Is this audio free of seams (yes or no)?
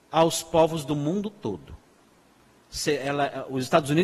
yes